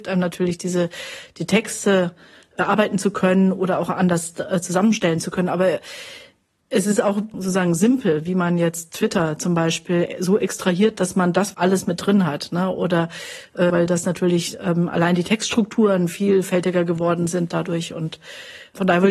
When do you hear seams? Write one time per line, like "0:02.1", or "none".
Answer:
0:07.3
0:11.5
0:13.7